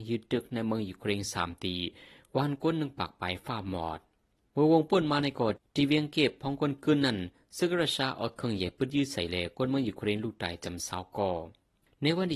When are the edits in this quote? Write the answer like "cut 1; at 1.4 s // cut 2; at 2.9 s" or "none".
cut 1; at 3.4 s